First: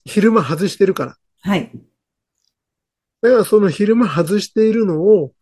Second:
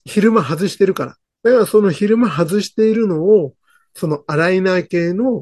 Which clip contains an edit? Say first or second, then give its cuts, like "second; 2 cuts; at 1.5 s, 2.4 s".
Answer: second; 1 cut; at 1.2 s